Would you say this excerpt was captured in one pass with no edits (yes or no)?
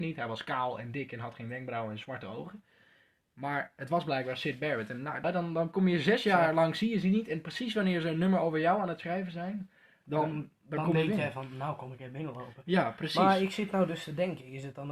no